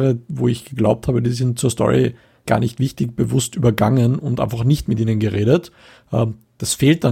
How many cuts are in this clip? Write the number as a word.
one